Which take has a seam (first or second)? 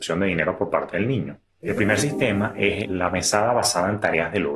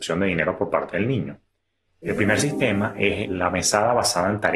first